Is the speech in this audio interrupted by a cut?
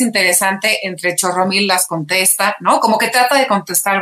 no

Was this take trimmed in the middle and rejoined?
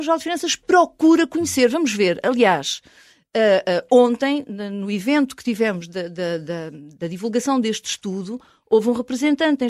no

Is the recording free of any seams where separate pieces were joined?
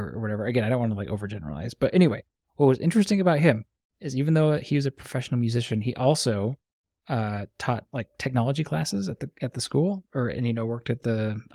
yes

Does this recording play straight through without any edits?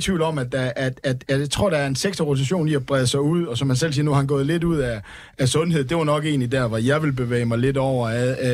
yes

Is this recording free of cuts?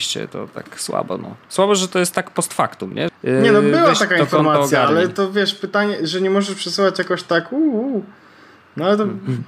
no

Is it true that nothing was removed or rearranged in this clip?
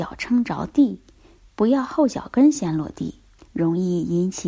no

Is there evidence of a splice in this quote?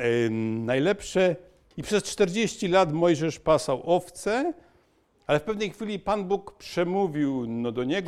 yes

